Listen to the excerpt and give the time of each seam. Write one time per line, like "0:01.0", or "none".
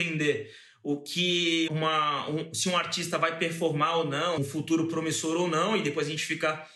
0:01.7
0:04.4